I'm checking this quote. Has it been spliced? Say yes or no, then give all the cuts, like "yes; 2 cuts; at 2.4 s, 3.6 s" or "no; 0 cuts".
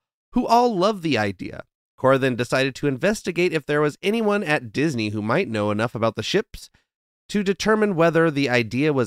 no; 0 cuts